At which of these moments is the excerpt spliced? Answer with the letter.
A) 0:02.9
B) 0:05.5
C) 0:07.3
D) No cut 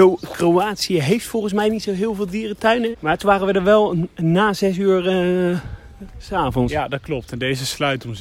A